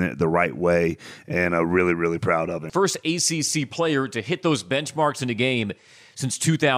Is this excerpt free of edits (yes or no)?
no